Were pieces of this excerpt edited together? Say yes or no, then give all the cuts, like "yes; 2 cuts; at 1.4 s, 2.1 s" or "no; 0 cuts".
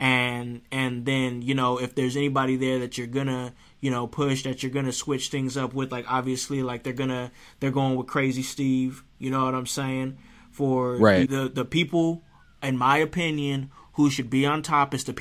yes; 1 cut; at 11.3 s